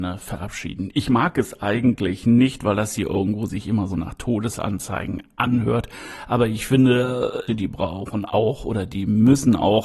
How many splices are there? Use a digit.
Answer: 2